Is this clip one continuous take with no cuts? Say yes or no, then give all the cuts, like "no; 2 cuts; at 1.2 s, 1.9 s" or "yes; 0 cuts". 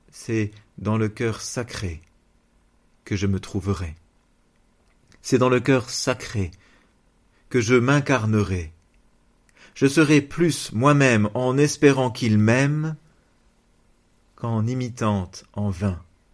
yes; 0 cuts